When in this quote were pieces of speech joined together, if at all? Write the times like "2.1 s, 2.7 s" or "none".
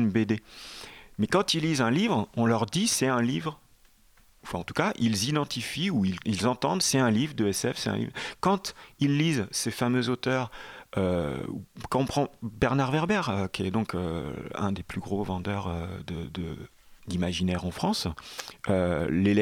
6.2 s, 17.0 s